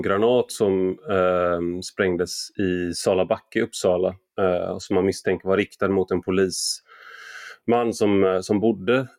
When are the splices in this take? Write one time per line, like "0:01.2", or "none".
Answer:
none